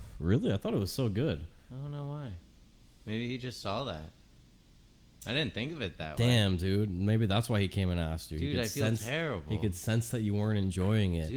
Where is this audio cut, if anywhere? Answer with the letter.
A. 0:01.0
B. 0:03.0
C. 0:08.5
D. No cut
D